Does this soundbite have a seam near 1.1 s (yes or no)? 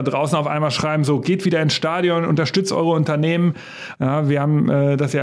no